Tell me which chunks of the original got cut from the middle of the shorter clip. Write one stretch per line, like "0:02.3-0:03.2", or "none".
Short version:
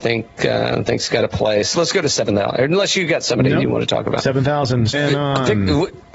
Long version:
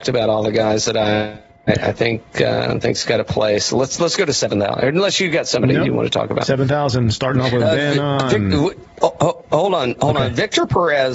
0:03.7-0:04.0
0:07.2-0:07.8